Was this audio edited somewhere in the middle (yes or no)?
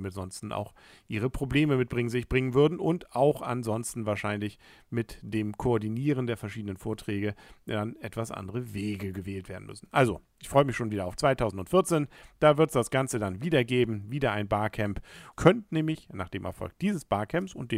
yes